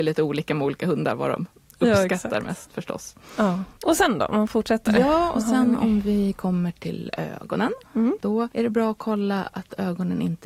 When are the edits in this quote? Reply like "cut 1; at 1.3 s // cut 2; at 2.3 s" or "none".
none